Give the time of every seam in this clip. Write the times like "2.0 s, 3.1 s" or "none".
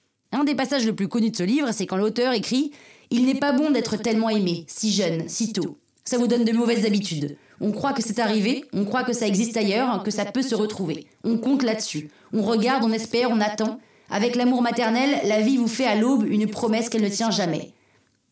none